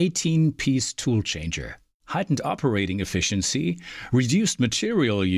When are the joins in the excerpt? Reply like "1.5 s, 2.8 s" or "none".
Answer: none

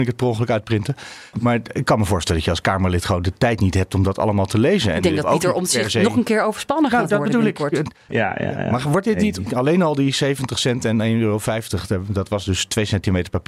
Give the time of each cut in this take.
1.3 s, 8.1 s, 9.5 s

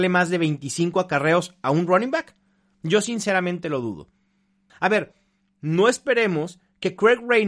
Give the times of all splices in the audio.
4.7 s

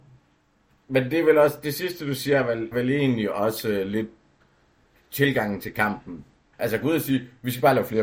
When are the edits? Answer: 2.7 s, 6.5 s

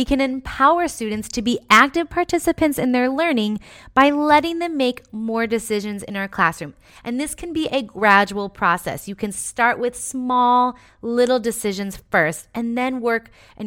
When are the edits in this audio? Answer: none

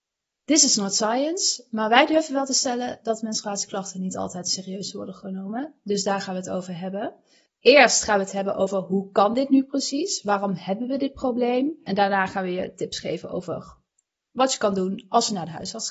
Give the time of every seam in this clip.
none

